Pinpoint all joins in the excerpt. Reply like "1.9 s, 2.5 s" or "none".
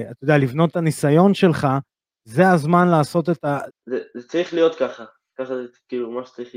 3.7 s

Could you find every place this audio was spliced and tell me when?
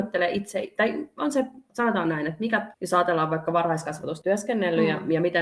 2.7 s, 4.2 s

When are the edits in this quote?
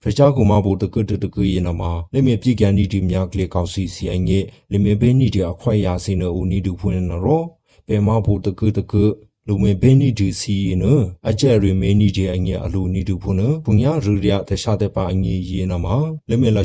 8.7 s

